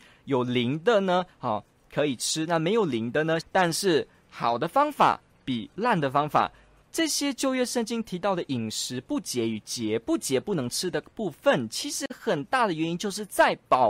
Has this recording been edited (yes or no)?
yes